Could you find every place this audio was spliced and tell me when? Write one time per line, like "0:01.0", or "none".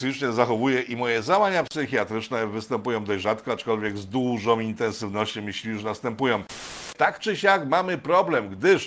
none